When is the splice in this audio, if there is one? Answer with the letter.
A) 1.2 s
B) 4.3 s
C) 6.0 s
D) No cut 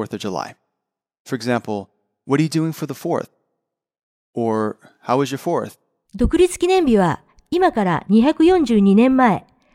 C